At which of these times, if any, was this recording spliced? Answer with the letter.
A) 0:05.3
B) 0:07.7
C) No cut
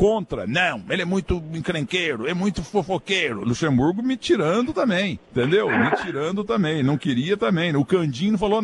A